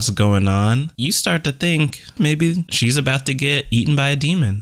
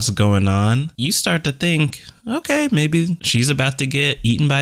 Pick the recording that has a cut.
first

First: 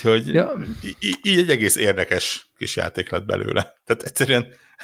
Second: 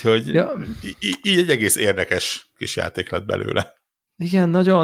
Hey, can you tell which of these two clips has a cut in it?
first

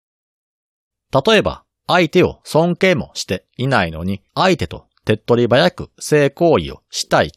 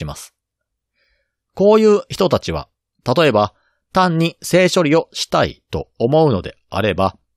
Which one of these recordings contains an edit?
first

